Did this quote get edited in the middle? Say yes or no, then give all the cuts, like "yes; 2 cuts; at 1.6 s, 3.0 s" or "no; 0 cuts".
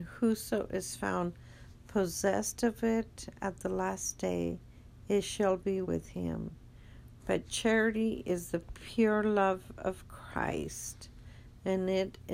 yes; 2 cuts; at 5.8 s, 7.2 s